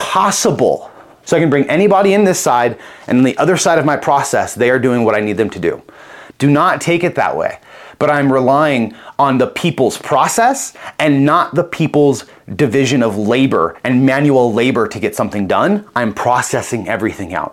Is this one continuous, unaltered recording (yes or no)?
no